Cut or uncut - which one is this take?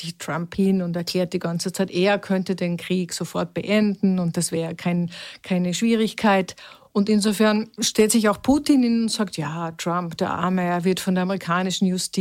uncut